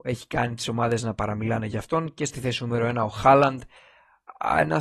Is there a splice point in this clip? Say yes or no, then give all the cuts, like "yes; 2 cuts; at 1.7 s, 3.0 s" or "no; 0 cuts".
no; 0 cuts